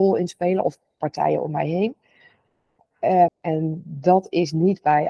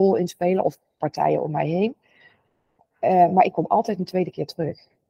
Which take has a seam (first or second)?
first